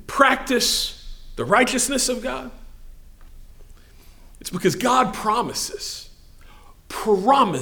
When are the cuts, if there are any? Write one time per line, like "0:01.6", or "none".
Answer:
none